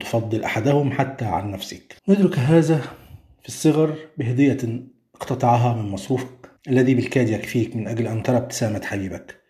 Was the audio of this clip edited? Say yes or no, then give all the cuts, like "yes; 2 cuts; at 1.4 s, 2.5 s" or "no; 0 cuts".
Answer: yes; 2 cuts; at 2.0 s, 6.6 s